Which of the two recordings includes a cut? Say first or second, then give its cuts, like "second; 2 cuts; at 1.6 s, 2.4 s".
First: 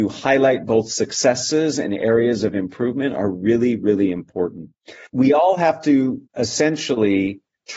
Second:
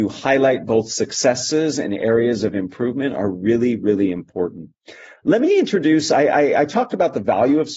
first; 2 cuts; at 5.1 s, 6.3 s